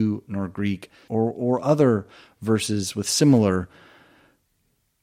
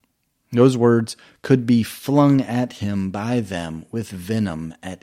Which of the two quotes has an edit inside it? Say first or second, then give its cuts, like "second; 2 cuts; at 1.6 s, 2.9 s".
first; 1 cut; at 1.1 s